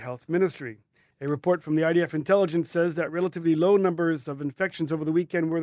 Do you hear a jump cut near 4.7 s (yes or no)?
no